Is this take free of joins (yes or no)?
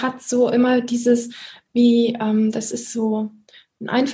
yes